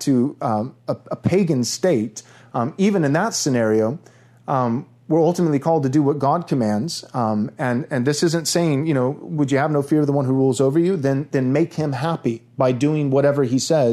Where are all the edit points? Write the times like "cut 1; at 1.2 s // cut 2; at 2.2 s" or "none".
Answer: none